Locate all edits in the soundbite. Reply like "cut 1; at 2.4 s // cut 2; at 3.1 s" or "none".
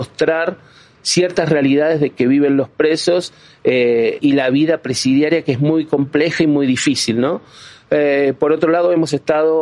cut 1; at 4.2 s

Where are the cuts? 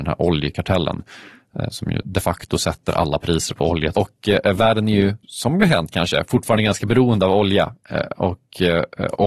cut 1; at 3.9 s // cut 2; at 5.2 s

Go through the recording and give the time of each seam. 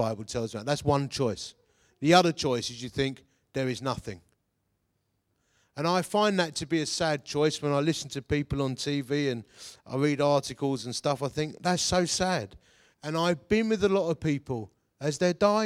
cut 1; at 12.9 s

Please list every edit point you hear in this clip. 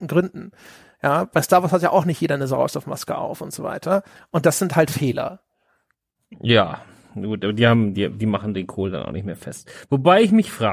cut 1; at 4.2 s

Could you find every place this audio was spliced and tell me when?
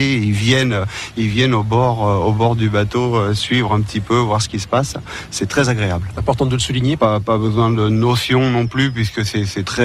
cut 1; at 7.0 s

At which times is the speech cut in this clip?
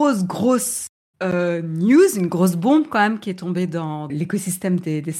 cut 1; at 4.1 s

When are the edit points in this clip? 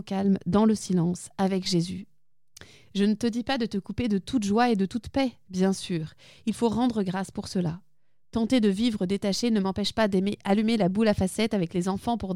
none

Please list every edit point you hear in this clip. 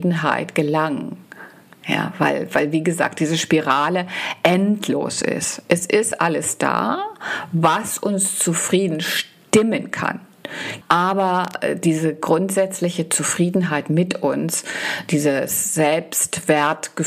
cut 1; at 10.8 s

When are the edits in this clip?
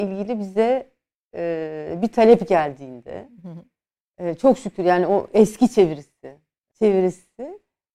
cut 1; at 6.7 s

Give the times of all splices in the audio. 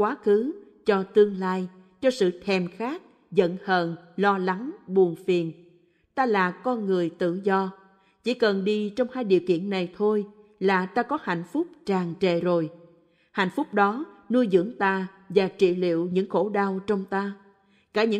none

